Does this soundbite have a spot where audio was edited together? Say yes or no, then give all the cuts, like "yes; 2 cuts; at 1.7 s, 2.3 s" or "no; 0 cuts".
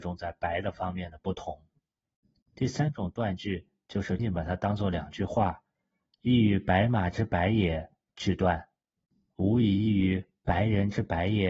yes; 1 cut; at 4.2 s